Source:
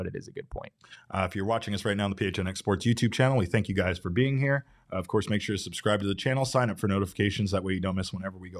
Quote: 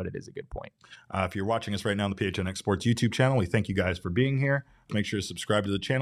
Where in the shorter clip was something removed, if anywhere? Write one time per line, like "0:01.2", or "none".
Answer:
0:04.9